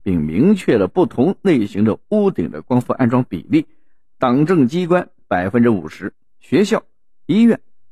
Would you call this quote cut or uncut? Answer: uncut